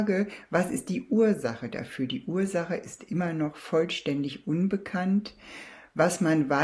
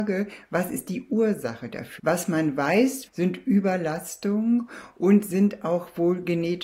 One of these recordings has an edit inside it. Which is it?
second; 2 cuts; at 2.0 s, 3.1 s

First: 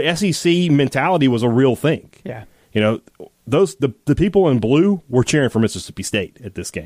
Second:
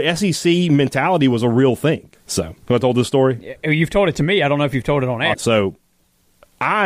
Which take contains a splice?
second; 2 cuts; at 2.1 s, 5.3 s

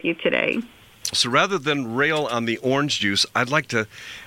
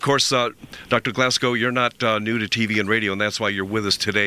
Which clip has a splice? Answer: first; 1 cut; at 1.1 s

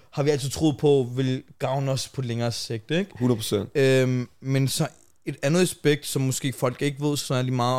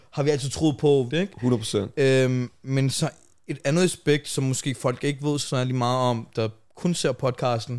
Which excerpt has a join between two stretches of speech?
second; 1 cut; at 1.1 s

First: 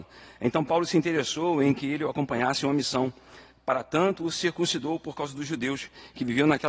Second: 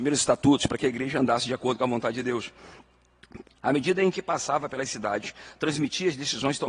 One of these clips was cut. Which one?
second; 1 cut; at 3.4 s

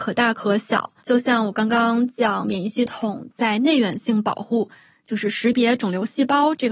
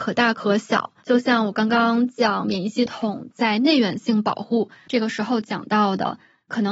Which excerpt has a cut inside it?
second; 1 cut; at 4.9 s

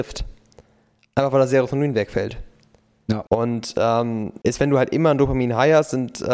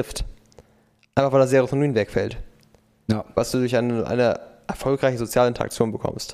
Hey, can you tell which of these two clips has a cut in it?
first; 2 cuts; at 3.3 s, 4.4 s

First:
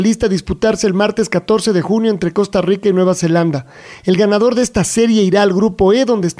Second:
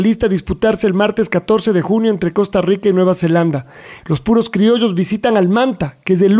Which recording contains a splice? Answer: second; 1 cut; at 4.0 s

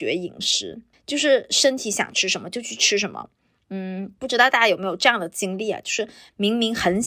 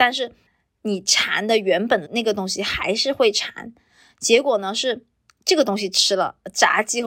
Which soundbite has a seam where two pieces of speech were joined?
second; 1 cut; at 2.1 s

